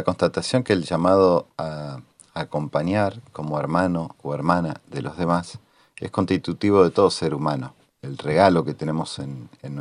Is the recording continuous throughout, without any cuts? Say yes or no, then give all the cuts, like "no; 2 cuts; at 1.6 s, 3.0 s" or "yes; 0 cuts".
no; 1 cut; at 7.9 s